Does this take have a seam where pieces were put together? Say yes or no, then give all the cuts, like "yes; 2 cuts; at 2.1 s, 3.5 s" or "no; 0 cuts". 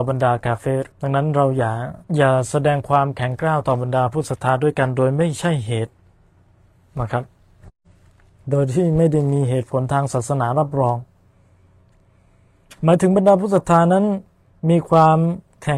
yes; 2 cuts; at 0.9 s, 2.0 s